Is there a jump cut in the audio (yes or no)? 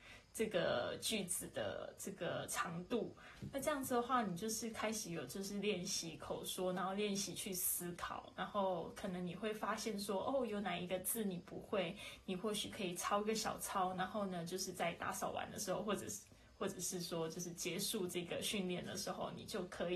no